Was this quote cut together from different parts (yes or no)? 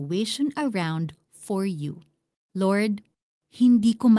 no